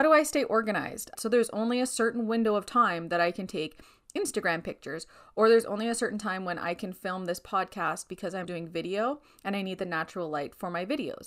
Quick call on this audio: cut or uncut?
cut